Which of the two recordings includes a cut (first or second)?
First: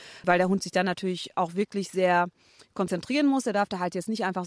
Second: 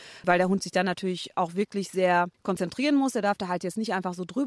second